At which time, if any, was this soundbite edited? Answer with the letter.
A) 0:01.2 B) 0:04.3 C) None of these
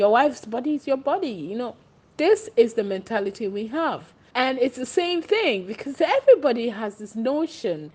B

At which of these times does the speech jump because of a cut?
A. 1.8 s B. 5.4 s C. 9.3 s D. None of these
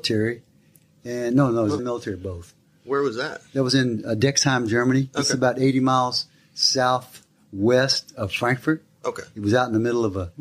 A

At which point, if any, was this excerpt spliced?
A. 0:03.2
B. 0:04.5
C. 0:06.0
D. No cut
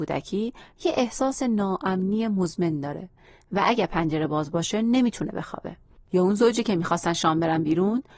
C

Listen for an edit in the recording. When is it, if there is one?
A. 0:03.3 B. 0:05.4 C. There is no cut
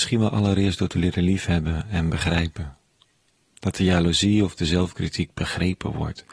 C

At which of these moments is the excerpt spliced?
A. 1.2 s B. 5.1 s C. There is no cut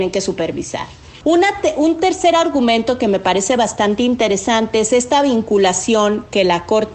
A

